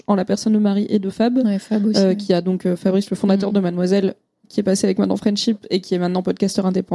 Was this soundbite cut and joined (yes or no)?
no